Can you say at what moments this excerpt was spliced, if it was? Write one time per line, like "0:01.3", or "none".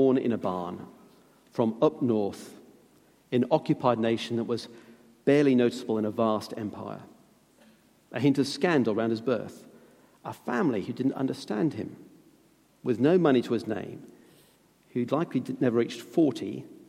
none